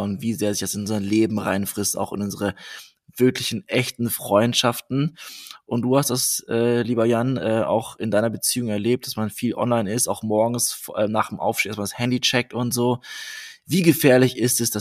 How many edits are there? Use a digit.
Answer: 0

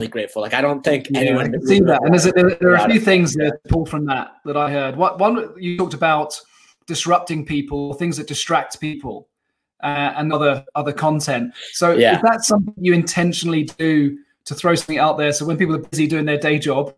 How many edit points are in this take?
1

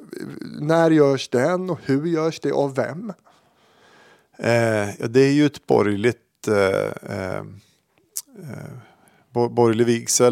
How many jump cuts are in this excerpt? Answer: 0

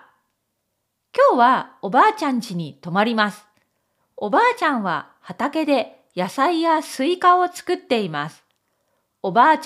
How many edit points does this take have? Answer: 1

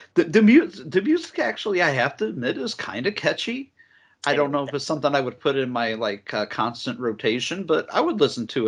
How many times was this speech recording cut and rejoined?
0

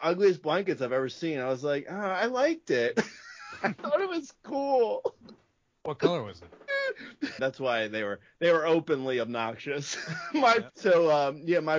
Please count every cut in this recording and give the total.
2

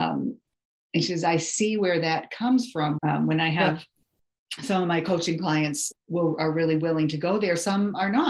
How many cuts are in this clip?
2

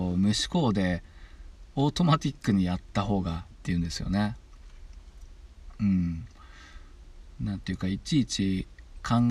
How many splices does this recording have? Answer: 1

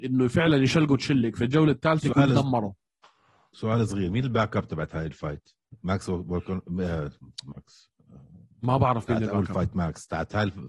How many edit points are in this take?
0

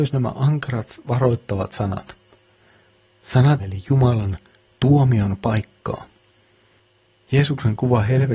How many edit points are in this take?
1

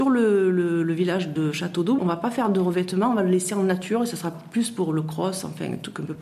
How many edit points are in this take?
1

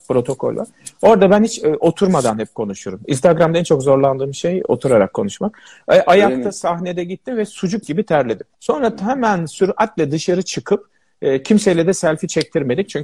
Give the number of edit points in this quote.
1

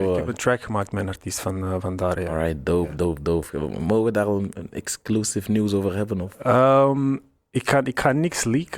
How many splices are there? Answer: 0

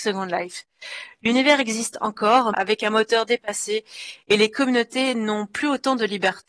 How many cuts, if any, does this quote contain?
1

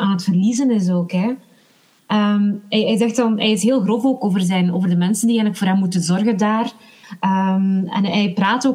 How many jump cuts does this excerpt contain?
0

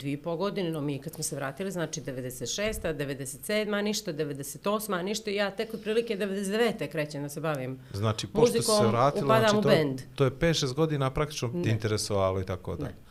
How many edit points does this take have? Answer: 1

